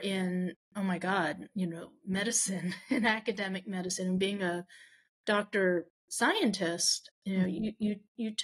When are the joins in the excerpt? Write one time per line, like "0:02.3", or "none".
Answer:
0:07.2